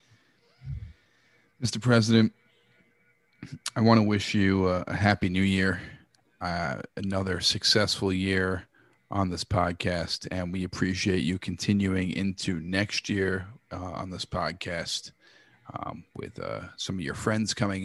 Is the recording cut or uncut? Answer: uncut